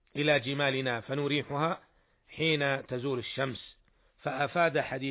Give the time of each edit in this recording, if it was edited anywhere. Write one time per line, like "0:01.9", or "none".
none

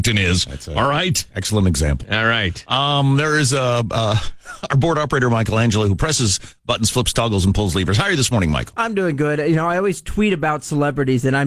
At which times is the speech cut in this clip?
none

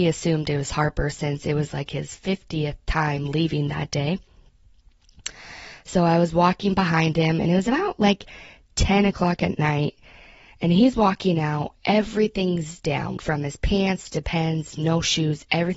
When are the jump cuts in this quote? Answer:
0:13.2

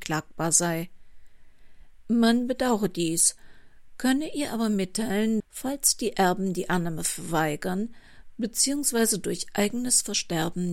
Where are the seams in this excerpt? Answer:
0:05.4

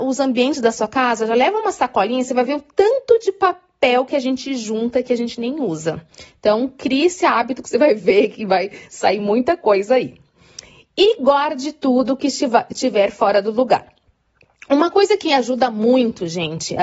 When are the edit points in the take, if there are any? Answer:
none

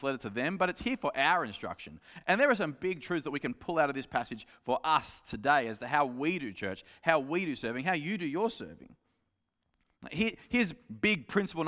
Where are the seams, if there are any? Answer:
none

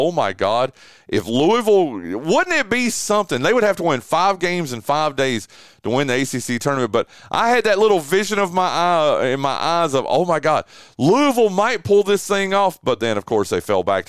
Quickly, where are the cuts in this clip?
none

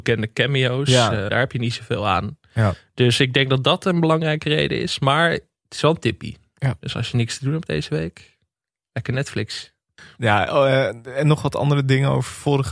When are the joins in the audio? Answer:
0:01.3

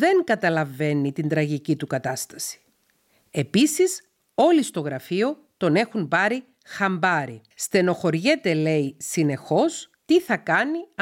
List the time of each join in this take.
0:07.5

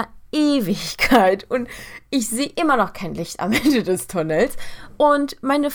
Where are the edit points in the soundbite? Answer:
none

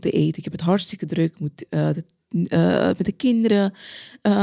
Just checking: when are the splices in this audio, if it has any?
none

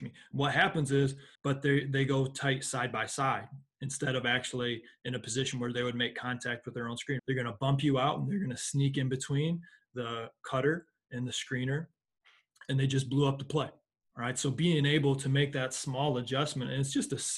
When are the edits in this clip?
0:01.4
0:07.2

